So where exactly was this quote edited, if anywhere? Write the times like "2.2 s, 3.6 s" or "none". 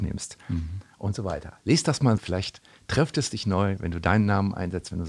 2.2 s